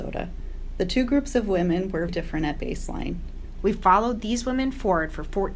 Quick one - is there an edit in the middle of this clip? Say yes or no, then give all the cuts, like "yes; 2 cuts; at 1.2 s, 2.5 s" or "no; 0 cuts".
yes; 2 cuts; at 2.1 s, 3.6 s